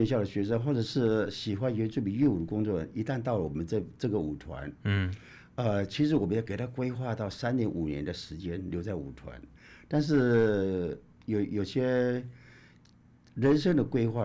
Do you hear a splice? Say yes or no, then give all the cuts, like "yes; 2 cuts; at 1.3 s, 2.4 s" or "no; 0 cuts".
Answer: no; 0 cuts